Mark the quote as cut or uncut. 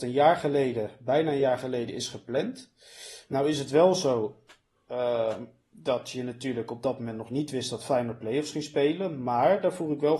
uncut